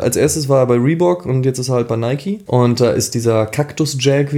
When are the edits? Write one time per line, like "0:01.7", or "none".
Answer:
0:02.4